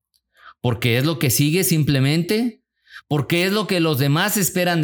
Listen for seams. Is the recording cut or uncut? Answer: uncut